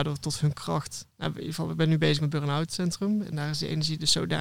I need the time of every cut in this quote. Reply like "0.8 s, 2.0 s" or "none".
1.1 s, 3.2 s